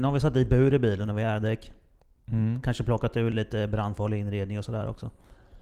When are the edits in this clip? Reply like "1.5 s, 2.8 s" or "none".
3.3 s

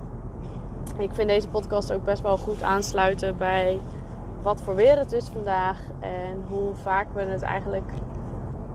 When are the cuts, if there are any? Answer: 4.4 s

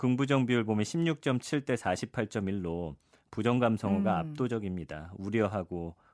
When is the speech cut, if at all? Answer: none

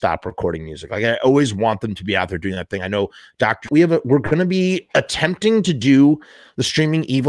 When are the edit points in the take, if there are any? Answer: 3.7 s

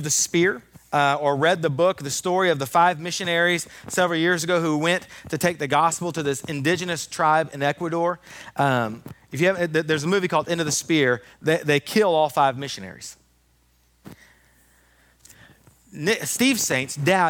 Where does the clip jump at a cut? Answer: 11.3 s

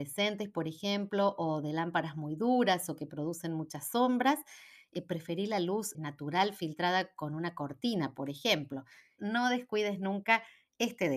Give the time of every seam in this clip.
5.9 s, 9.2 s

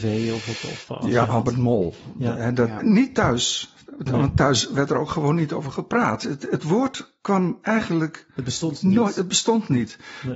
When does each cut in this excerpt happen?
1.2 s, 2.8 s

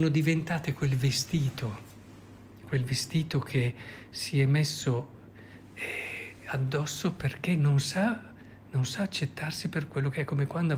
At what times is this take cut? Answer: none

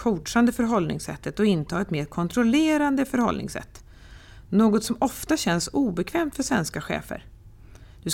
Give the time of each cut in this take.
none

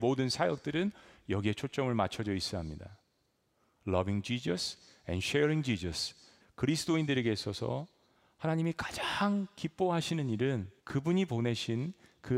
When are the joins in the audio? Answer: 6.4 s, 10.8 s

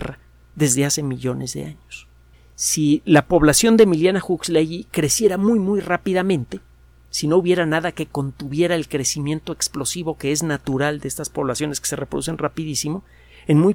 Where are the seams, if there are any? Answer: 2.3 s

